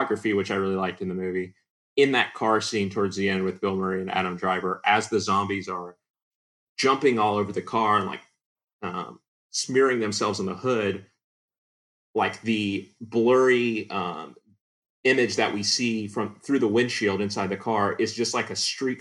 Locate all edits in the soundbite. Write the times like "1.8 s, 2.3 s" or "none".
none